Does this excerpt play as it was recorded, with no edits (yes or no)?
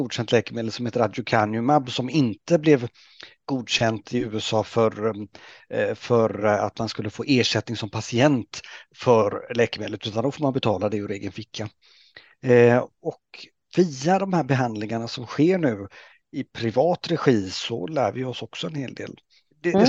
yes